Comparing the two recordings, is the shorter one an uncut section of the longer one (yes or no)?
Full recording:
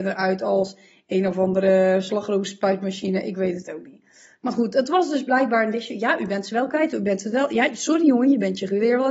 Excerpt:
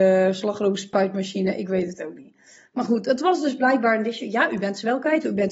yes